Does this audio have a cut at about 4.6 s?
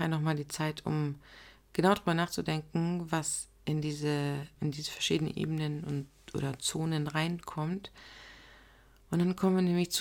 yes; 1 cut; at 4.6 s

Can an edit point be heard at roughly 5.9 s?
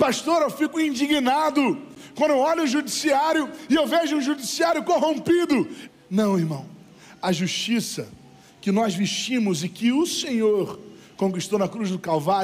yes; 1 cut; at 5.9 s

